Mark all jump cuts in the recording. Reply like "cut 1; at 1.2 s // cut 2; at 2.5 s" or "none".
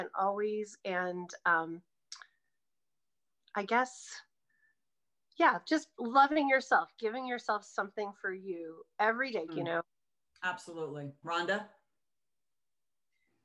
cut 1; at 9.5 s // cut 2; at 11.2 s